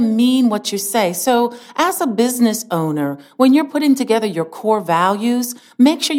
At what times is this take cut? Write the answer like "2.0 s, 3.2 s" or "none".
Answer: none